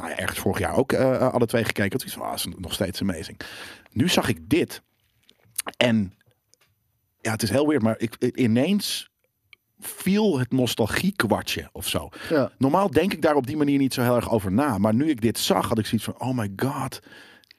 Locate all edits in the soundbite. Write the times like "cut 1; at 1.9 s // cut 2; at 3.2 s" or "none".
none

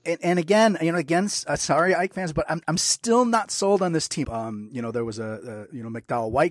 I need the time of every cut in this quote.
cut 1; at 4.2 s

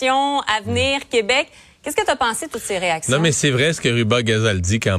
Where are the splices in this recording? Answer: none

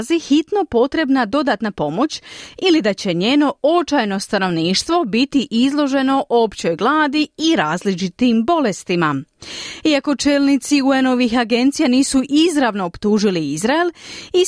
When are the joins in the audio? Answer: none

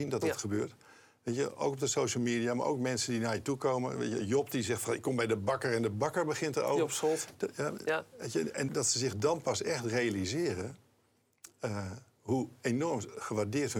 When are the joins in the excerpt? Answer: cut 1; at 8.7 s

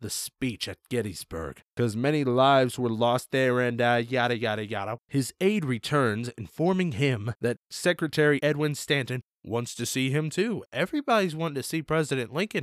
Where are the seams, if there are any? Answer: cut 1; at 5.0 s

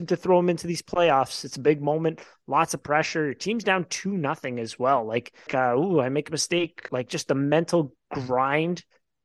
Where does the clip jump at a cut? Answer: cut 1; at 5.5 s // cut 2; at 6.9 s

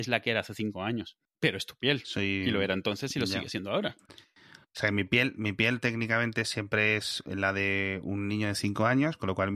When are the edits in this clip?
none

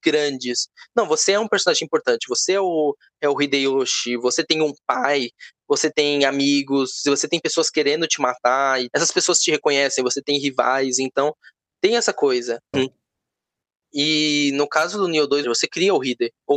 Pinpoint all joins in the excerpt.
cut 1; at 8.9 s // cut 2; at 12.7 s // cut 3; at 15.4 s

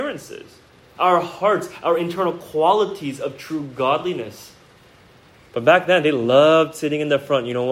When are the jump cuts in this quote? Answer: cut 1; at 1.0 s // cut 2; at 5.5 s

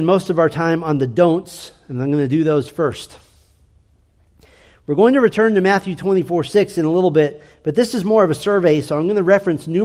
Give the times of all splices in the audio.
none

